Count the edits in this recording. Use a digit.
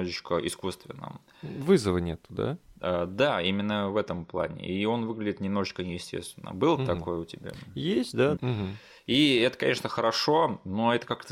1